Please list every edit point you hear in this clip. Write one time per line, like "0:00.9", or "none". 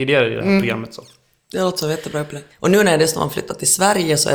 0:02.5